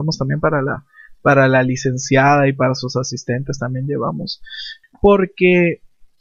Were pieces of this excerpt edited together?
yes; 1 cut; at 4.8 s

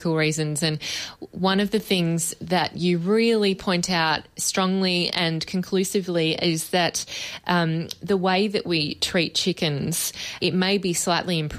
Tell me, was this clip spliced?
yes; 1 cut; at 10.4 s

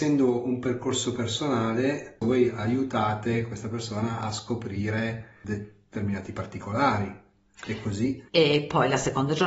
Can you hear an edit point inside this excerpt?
yes; 1 cut; at 8.3 s

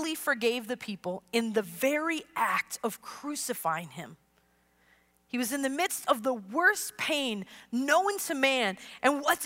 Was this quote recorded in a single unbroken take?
yes; 0 cuts

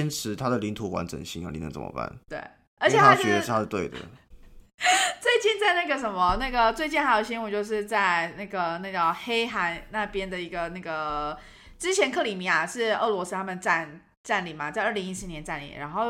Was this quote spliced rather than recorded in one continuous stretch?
no; 0 cuts

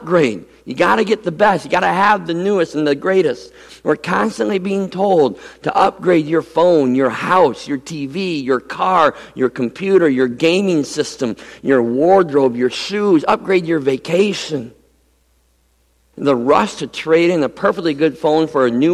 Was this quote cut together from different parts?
yes; 1 cut; at 16.1 s

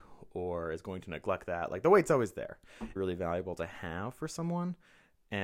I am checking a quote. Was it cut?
yes; 1 cut; at 3.0 s

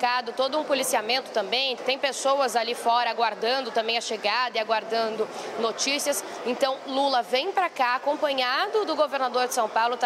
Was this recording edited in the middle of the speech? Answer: yes; 1 cut; at 1.8 s

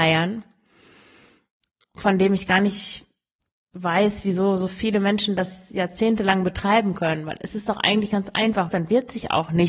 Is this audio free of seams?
no; 1 cut; at 8.7 s

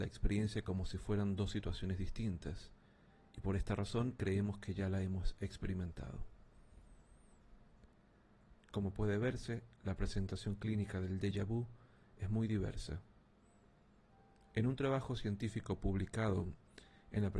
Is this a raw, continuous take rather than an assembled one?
no; 1 cut; at 8.6 s

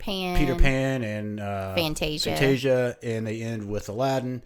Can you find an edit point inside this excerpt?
no; 0 cuts

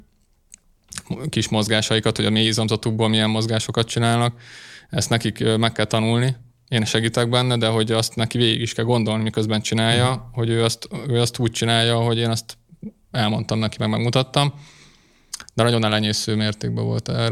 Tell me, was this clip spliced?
no; 0 cuts

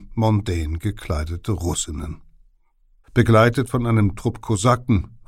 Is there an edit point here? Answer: yes; 1 cut; at 3.0 s

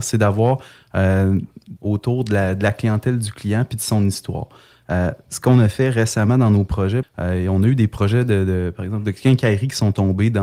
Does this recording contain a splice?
yes; 2 cuts; at 1.8 s, 7.0 s

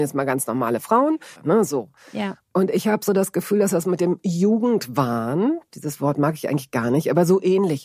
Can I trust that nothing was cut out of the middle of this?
no; 1 cut; at 1.4 s

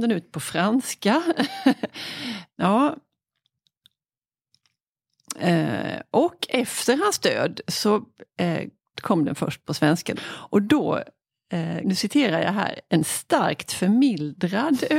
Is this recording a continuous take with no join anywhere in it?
no; 3 cuts; at 2.6 s, 10.2 s, 11.8 s

